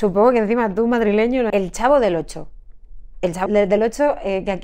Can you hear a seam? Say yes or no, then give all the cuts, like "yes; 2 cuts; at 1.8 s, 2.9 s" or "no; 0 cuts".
yes; 2 cuts; at 1.5 s, 3.5 s